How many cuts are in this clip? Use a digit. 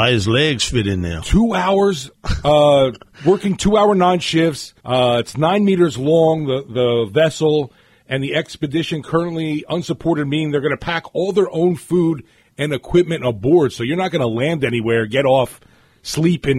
1